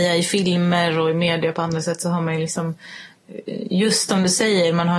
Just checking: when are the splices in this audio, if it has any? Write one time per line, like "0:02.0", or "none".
0:04.1